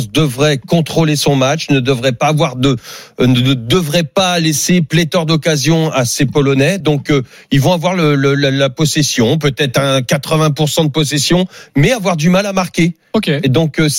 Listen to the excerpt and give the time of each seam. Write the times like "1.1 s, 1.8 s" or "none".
none